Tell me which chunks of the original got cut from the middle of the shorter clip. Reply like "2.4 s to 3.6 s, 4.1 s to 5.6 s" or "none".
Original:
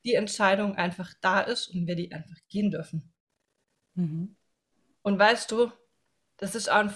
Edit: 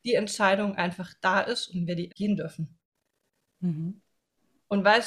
2.1 s to 2.4 s